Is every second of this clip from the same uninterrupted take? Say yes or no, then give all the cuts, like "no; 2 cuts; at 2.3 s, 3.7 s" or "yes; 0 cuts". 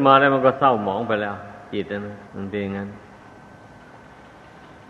no; 1 cut; at 2.3 s